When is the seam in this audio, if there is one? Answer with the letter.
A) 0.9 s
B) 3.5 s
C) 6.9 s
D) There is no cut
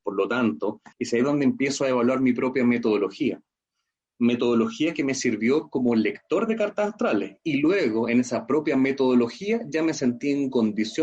A